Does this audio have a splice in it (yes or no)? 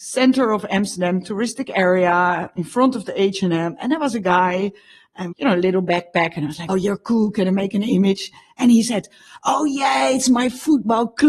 yes